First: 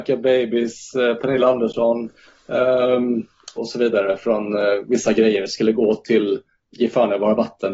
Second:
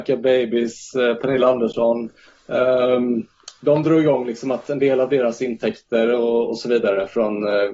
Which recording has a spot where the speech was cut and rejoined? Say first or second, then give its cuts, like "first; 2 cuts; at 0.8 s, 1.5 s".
first; 1 cut; at 3.6 s